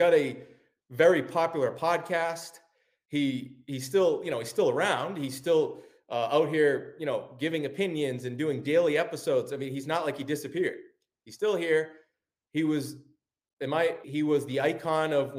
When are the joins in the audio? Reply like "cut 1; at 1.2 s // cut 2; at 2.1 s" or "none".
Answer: cut 1; at 14.0 s

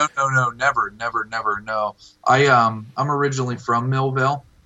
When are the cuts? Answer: none

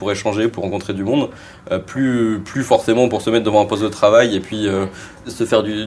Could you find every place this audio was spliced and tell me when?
none

